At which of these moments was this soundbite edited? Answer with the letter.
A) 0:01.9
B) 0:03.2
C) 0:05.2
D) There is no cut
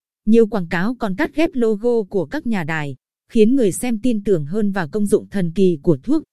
B